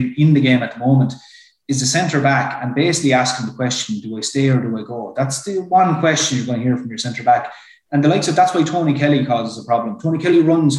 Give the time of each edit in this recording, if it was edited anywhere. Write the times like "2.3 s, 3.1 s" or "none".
none